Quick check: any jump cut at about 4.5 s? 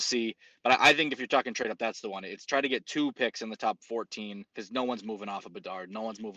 yes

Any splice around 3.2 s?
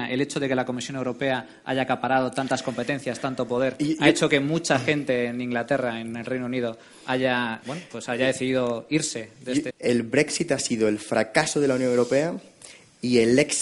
no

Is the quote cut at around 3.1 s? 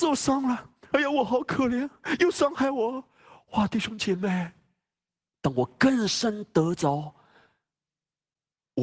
no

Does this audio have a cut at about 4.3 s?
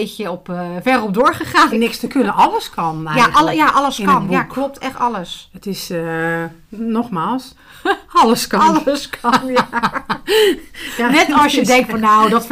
no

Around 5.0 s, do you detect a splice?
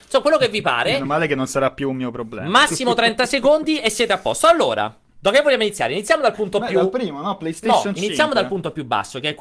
yes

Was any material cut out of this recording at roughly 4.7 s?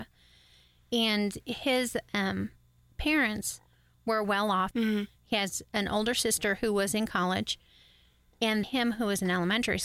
yes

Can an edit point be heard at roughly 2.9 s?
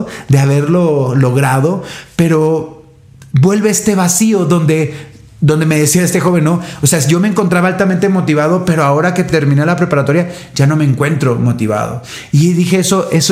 no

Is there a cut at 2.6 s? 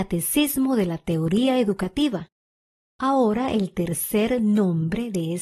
no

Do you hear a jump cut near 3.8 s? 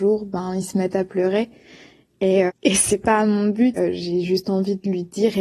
yes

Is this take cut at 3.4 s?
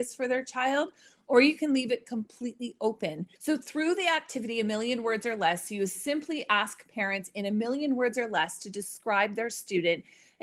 yes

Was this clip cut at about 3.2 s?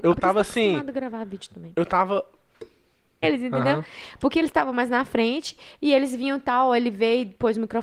yes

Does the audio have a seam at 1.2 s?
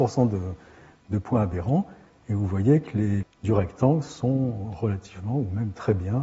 no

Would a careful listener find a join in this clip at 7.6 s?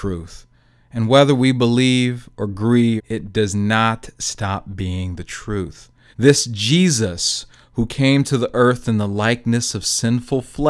no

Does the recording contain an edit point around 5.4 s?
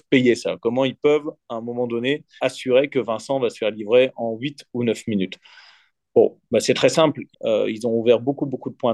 no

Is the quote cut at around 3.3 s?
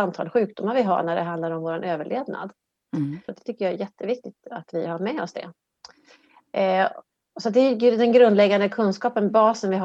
yes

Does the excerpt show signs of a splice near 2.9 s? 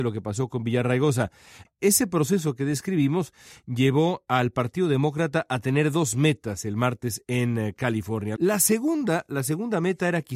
no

